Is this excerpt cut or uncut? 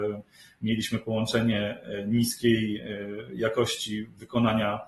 uncut